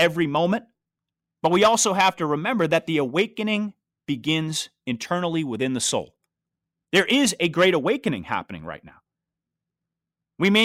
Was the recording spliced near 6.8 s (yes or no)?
yes